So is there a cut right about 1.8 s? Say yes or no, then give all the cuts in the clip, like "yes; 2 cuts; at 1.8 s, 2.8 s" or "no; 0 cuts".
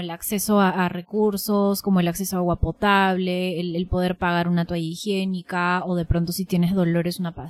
no; 0 cuts